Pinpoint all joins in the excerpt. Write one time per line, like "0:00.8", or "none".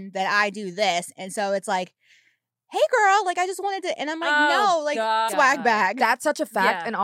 0:05.3